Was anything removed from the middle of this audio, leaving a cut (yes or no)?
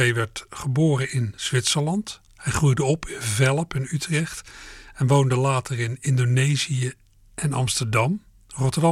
no